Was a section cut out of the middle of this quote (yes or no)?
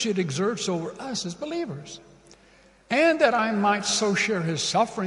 no